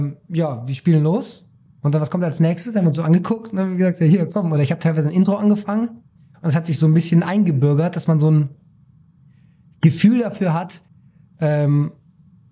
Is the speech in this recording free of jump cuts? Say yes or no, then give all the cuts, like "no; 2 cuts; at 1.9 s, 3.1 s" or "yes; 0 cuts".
yes; 0 cuts